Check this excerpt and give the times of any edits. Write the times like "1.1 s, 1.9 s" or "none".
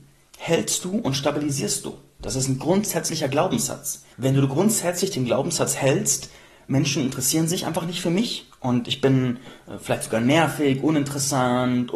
2.2 s, 4.1 s